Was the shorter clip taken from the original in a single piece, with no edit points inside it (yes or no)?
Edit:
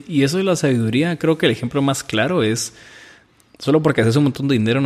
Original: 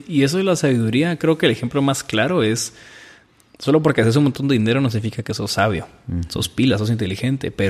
yes